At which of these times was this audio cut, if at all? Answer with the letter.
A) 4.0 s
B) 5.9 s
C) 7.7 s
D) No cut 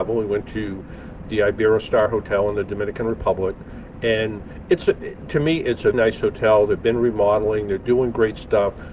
B